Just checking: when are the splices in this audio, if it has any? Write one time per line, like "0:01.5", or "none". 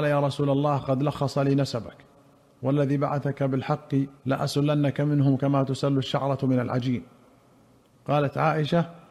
0:04.2

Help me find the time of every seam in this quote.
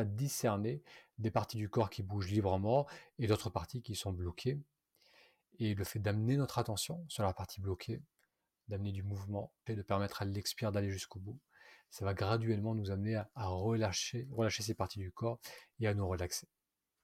0:09.7

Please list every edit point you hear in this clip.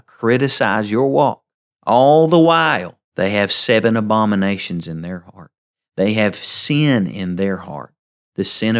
none

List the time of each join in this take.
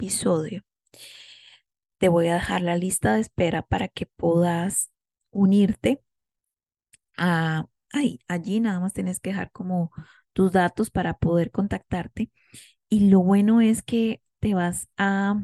none

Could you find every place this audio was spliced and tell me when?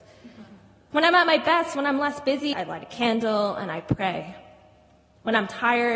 0:02.5

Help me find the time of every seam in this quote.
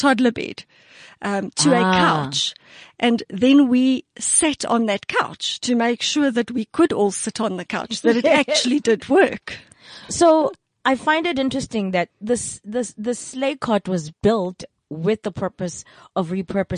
none

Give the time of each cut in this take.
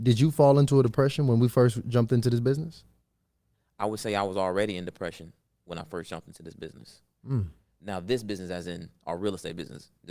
none

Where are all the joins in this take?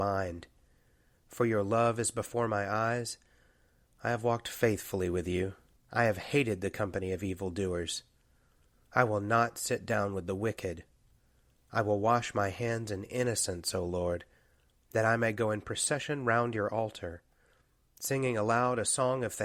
0:05.8

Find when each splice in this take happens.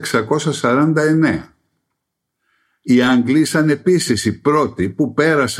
none

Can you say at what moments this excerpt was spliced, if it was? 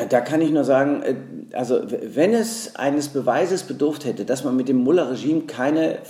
none

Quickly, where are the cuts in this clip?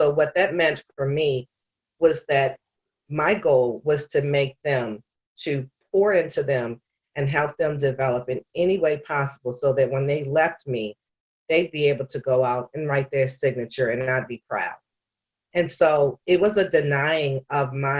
none

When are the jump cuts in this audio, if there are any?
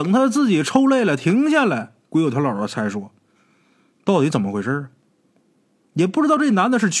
none

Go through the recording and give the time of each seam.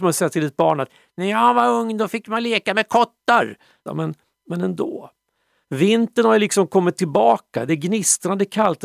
0:03.9
0:05.6

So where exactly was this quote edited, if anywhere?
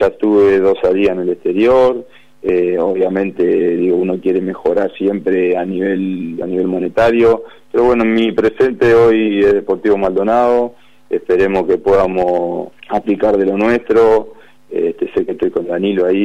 0:06.4
0:12.8

